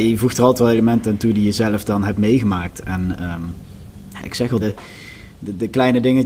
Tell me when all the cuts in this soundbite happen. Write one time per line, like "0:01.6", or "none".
0:04.6